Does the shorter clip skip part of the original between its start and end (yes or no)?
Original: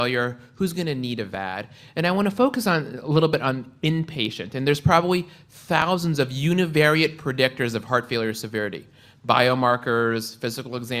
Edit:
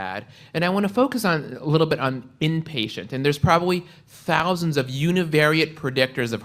no